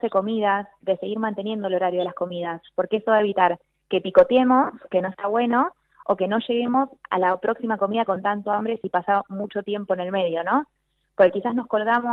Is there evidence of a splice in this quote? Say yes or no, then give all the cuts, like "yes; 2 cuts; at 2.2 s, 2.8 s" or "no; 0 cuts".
no; 0 cuts